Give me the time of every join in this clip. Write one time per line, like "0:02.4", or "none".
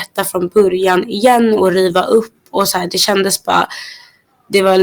none

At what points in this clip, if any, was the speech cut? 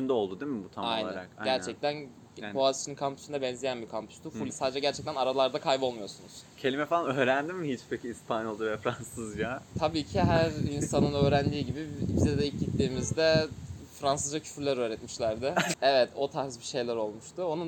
0:04.5
0:15.7

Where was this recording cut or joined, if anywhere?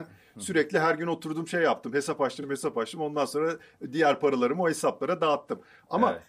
0:02.4

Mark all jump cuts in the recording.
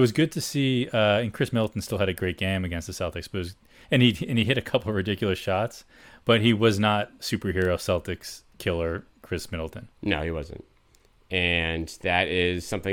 0:07.2
0:10.0

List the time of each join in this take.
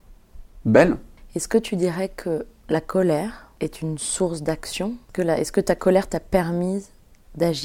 none

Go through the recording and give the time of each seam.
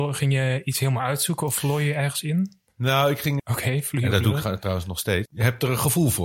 0:03.4
0:05.3

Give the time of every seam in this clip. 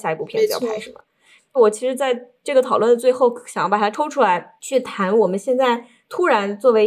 0:01.4

